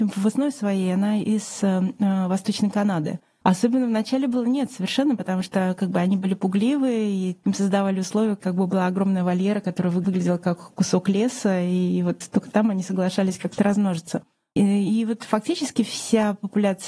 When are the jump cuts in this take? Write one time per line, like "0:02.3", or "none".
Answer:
0:03.4